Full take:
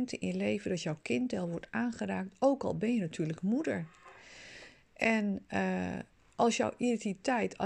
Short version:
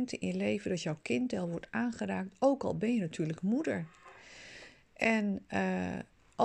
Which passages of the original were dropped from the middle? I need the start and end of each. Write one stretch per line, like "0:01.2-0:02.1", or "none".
none